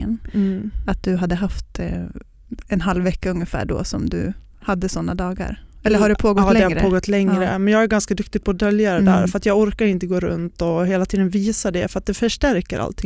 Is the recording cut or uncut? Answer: uncut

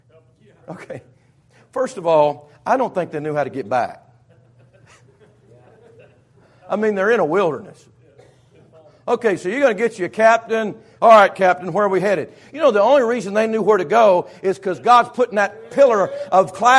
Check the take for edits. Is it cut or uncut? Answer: uncut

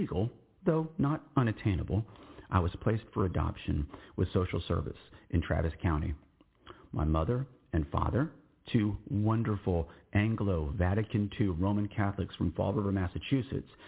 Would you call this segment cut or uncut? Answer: uncut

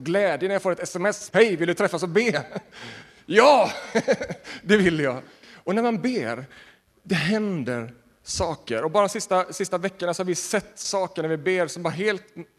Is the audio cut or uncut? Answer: cut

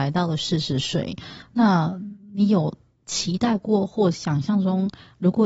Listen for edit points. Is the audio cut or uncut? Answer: uncut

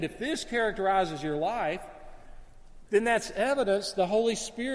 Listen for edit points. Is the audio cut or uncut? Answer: cut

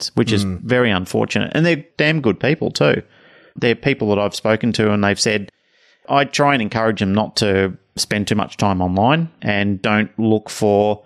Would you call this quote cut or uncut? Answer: uncut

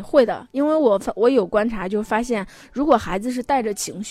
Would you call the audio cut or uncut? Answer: cut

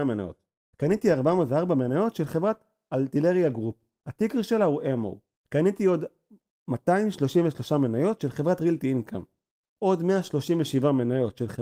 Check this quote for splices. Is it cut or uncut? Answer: cut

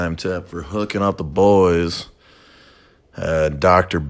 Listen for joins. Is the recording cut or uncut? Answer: uncut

